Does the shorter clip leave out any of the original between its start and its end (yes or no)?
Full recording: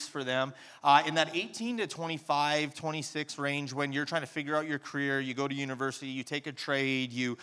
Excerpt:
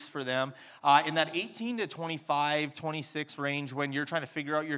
no